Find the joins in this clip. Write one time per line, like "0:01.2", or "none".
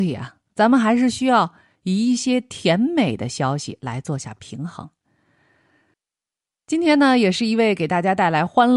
none